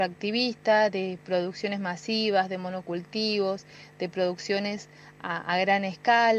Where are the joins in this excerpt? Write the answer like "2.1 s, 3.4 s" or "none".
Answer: none